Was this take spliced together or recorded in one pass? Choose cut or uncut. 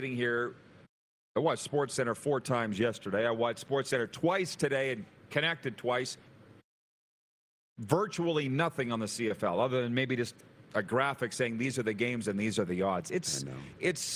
uncut